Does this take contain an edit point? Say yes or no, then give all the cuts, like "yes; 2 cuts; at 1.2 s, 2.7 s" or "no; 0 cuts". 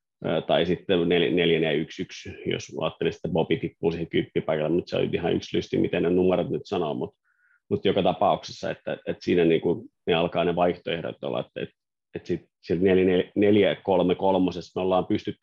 no; 0 cuts